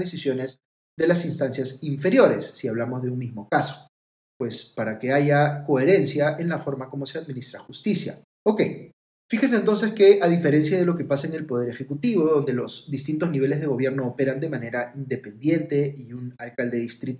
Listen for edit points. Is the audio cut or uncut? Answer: cut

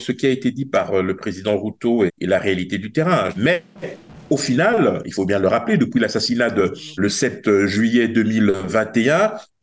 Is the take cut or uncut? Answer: cut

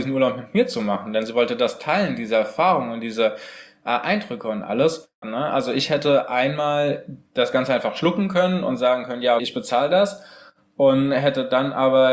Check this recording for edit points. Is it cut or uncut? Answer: cut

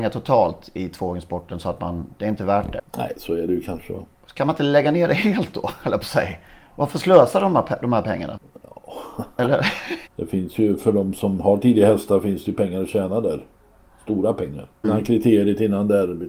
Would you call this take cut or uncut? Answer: cut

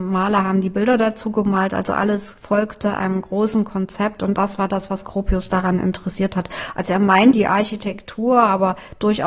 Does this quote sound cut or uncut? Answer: cut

